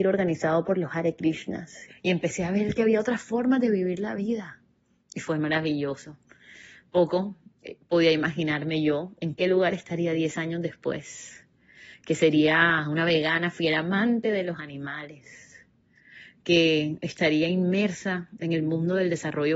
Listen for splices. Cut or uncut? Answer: cut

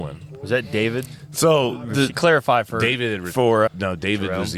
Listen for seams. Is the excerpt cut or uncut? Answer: cut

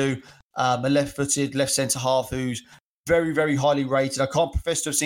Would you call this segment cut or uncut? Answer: uncut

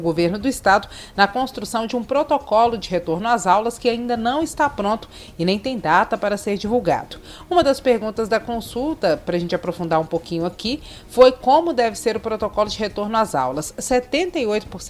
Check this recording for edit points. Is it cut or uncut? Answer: uncut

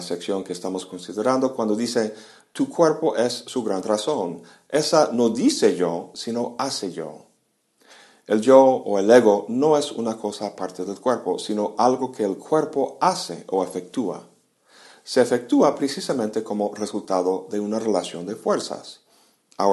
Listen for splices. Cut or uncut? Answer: uncut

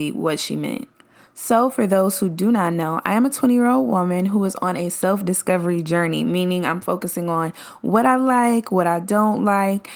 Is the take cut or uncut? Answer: uncut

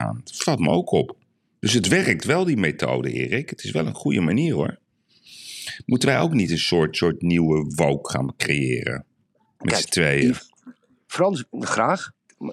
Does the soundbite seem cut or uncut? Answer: uncut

